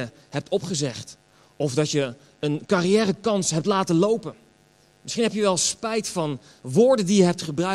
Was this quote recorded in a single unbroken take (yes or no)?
yes